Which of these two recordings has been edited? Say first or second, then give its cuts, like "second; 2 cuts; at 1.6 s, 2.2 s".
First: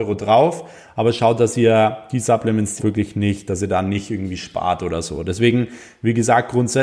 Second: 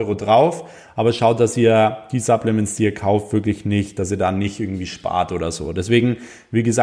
first; 1 cut; at 2.8 s